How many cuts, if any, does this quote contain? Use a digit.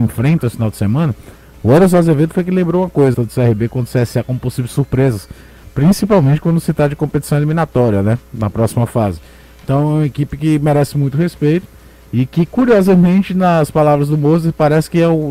1